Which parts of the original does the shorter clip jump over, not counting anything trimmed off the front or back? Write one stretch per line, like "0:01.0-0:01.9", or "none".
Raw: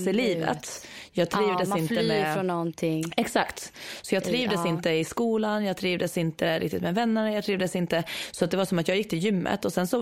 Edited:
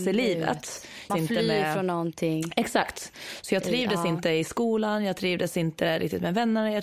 0:01.1-0:01.7